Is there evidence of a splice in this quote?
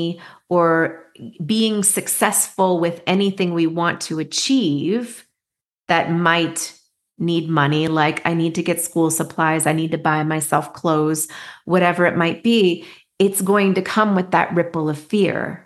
no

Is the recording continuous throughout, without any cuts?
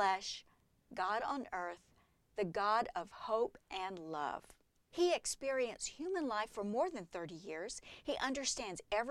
no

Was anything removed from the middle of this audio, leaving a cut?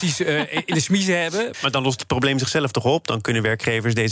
yes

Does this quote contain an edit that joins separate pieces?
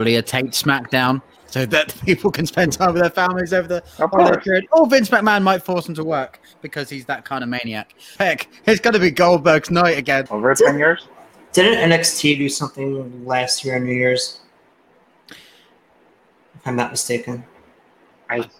yes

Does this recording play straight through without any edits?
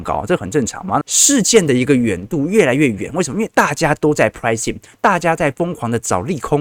no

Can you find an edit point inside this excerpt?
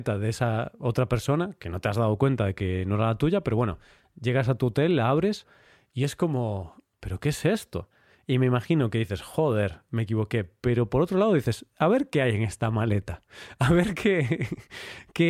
no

